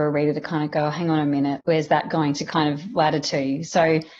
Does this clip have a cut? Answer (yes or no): no